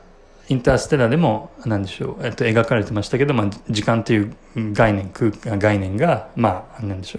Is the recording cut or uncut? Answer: uncut